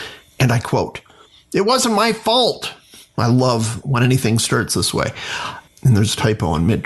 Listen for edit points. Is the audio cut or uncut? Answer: cut